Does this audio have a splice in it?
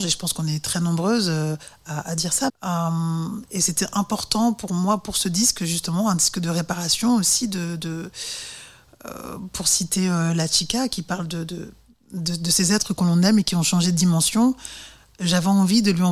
yes; 1 cut; at 2.5 s

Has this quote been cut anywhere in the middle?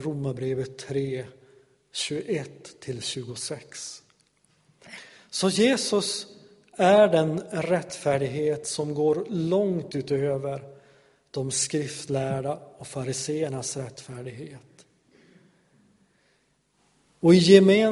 no; 0 cuts

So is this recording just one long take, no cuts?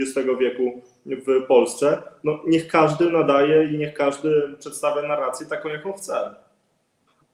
yes; 0 cuts

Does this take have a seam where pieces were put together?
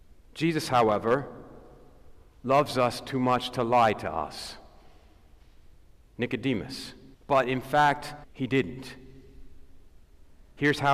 yes; 2 cuts; at 7.1 s, 8.2 s

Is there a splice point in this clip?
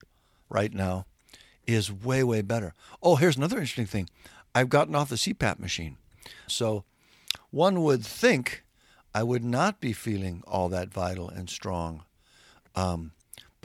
yes; 1 cut; at 6.5 s

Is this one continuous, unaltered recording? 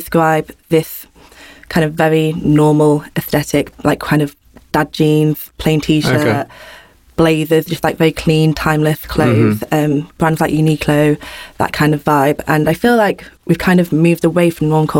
yes; 0 cuts

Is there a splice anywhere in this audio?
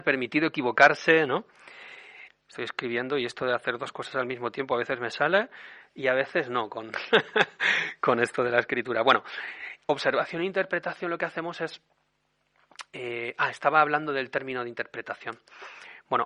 yes; 1 cut; at 2.3 s

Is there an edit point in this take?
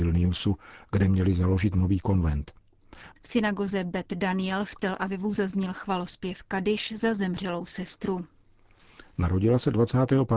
yes; 1 cut; at 3.1 s

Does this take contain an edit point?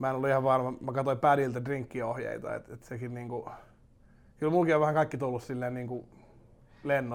no; 0 cuts

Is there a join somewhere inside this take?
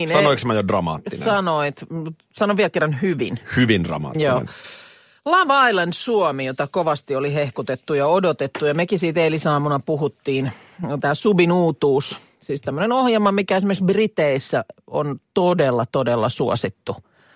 no; 0 cuts

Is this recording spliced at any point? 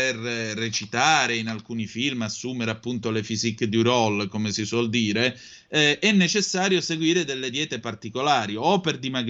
no; 0 cuts

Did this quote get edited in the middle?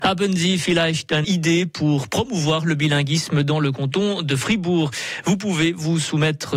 yes; 1 cut; at 1.2 s

